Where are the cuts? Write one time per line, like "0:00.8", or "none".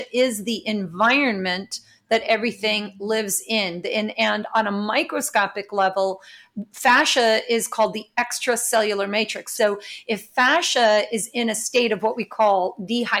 0:09.6